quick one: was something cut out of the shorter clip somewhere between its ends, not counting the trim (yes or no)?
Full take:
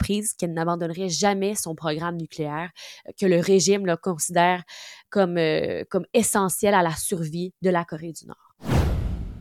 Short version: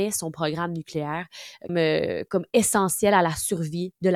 yes